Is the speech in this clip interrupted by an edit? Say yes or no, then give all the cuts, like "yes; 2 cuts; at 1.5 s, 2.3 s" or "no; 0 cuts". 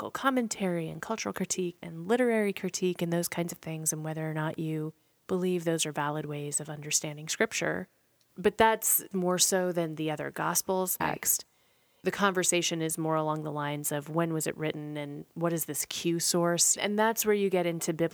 yes; 2 cuts; at 11.0 s, 16.8 s